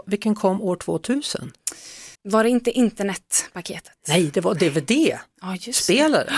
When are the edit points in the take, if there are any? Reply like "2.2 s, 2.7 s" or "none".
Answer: 2.1 s